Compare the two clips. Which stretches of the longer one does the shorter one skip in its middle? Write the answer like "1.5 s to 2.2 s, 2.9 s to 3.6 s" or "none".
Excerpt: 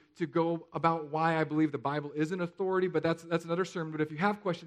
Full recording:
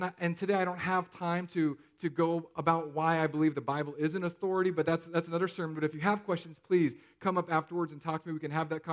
none